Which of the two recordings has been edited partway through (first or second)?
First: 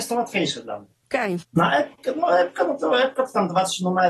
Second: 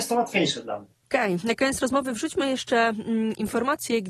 first